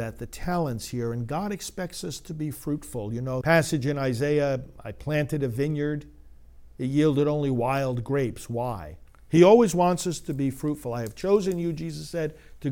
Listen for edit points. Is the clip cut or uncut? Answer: cut